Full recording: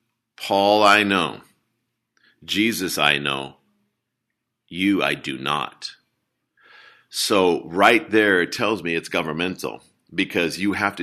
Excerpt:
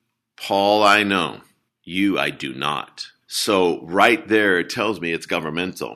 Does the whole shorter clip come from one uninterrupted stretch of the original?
no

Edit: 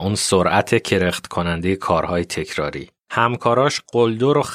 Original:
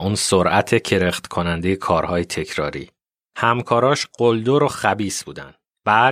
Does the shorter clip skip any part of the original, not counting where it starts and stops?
yes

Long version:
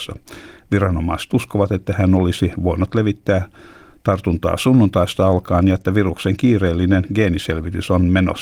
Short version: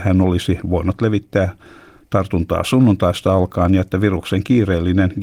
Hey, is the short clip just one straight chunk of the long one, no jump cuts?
yes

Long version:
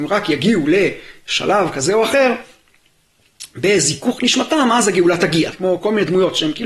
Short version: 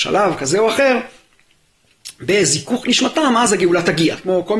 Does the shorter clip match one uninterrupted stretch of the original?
yes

